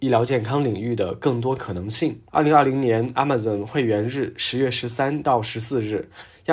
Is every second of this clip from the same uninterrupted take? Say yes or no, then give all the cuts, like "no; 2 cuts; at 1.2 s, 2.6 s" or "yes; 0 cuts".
no; 1 cut; at 2.3 s